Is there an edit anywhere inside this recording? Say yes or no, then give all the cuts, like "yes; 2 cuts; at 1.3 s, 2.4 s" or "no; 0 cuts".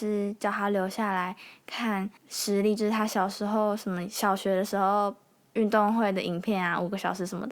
yes; 1 cut; at 2.2 s